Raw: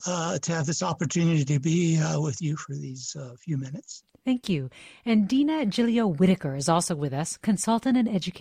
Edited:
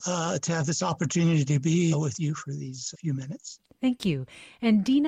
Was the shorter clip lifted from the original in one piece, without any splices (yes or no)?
no